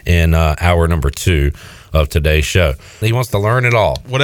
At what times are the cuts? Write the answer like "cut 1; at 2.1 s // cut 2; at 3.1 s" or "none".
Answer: cut 1; at 3.0 s